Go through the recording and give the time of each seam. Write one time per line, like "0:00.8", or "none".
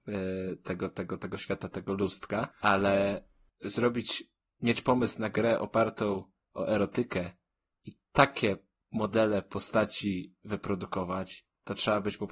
0:02.5